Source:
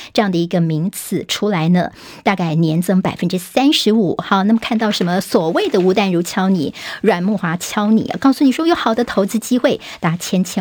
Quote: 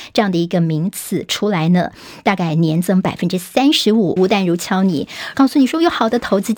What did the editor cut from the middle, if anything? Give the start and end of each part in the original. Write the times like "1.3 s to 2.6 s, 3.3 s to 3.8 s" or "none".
4.2 s to 5.8 s, 7.0 s to 8.2 s